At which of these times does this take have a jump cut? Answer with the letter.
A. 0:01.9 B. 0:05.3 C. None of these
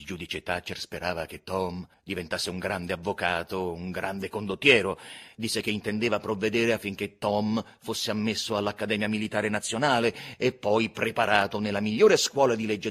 A